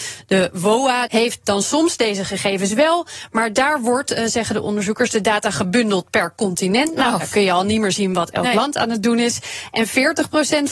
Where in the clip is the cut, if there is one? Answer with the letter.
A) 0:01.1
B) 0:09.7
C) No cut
A